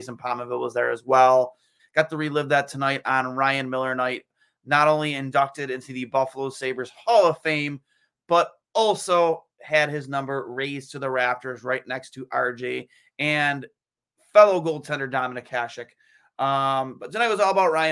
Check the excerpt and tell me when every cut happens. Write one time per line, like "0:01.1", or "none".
0:01.8